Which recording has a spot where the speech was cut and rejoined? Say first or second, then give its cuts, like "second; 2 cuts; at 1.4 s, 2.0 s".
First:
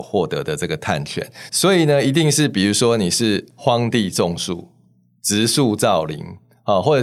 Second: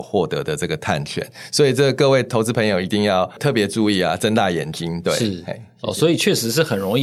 first; 1 cut; at 1.5 s